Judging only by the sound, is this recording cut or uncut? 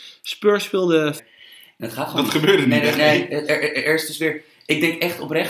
cut